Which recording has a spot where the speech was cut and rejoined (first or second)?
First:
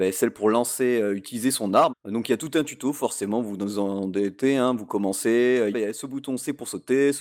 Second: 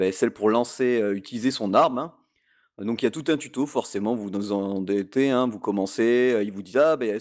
first